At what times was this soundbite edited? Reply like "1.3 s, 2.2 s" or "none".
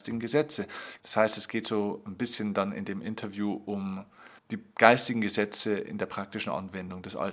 1.0 s, 4.4 s

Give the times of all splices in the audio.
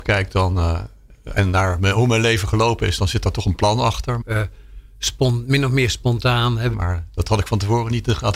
4.2 s, 6.7 s

